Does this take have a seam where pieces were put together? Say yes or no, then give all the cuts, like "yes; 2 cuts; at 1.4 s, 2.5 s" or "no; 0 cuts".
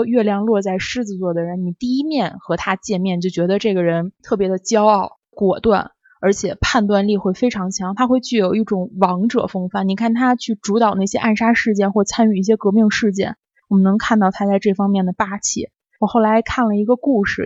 no; 0 cuts